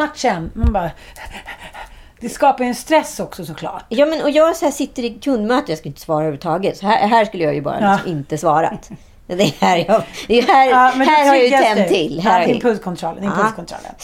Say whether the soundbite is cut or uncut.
cut